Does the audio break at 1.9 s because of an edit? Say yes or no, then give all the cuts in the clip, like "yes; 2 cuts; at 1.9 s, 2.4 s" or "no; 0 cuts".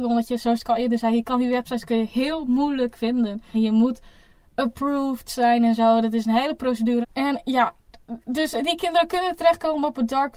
no; 2 cuts; at 3.5 s, 7.0 s